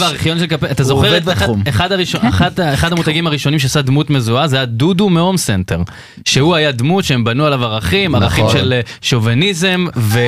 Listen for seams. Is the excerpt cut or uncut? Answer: uncut